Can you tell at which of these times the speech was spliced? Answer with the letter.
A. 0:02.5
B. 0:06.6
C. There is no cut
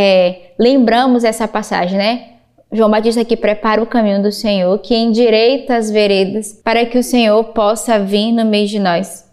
B